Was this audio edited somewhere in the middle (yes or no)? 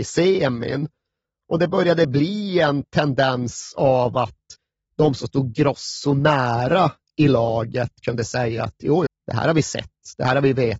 yes